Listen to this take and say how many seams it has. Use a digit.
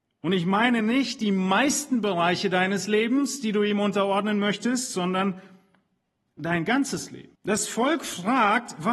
1